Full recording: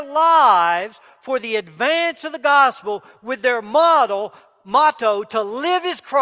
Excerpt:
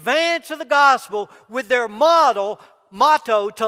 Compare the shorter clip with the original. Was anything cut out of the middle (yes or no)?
no